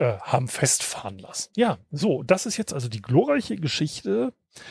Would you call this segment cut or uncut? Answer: uncut